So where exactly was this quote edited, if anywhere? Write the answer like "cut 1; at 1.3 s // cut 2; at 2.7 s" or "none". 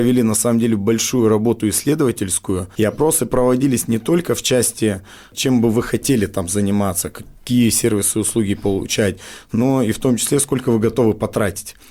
cut 1; at 2.7 s